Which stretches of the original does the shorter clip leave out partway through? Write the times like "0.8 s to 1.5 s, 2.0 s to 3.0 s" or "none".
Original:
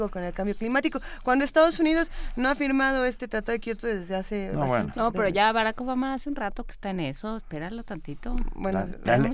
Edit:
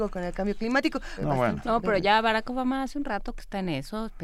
1.2 s to 4.5 s